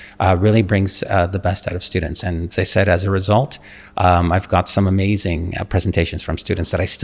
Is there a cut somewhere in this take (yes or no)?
yes